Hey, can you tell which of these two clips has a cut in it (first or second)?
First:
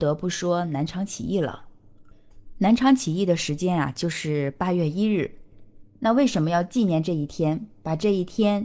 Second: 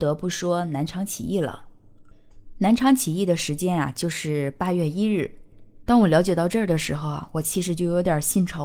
second